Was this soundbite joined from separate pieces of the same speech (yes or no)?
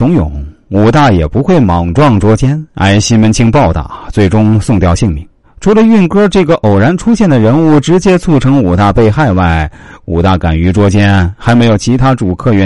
yes